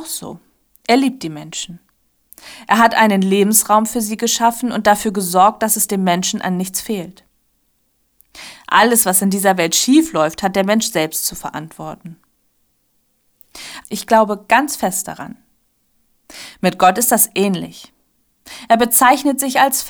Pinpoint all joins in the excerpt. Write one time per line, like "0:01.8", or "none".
0:13.8